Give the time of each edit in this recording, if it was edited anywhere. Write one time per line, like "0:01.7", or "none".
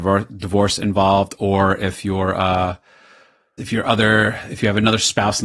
0:03.6